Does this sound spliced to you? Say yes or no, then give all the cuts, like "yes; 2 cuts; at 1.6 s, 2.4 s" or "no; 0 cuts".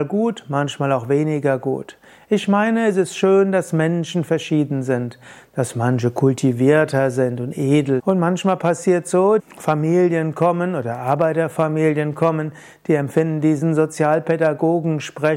yes; 2 cuts; at 8.0 s, 9.4 s